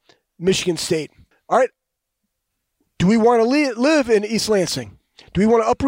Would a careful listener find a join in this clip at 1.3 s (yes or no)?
yes